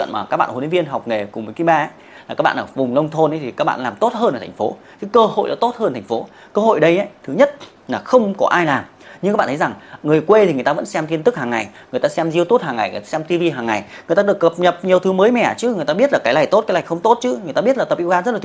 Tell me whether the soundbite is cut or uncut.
uncut